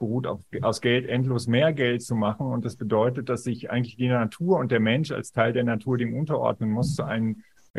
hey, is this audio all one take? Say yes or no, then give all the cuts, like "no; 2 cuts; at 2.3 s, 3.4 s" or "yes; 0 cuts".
yes; 0 cuts